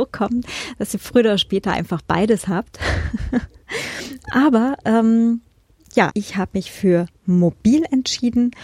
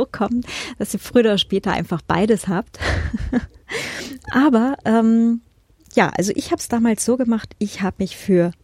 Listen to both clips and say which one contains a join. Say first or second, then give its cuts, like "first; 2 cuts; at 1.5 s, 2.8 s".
first; 1 cut; at 6.1 s